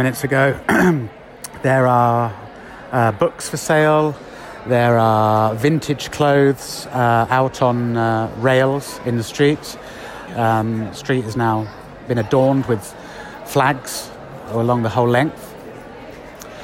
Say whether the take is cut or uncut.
cut